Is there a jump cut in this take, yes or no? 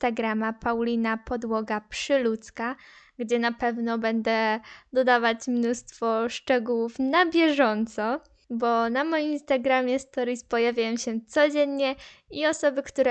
no